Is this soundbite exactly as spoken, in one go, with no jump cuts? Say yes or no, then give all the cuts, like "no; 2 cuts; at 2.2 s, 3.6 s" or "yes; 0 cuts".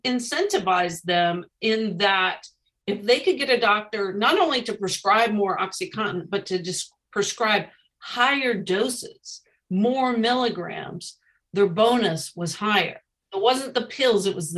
no; 1 cut; at 13.2 s